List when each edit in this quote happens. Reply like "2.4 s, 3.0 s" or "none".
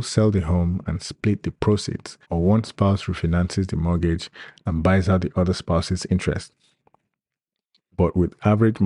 2.2 s